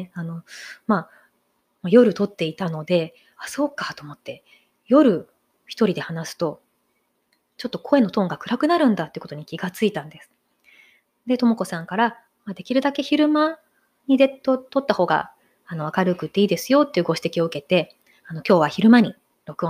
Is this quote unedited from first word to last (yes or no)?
yes